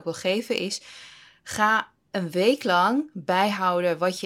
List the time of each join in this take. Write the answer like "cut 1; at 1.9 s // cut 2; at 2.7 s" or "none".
none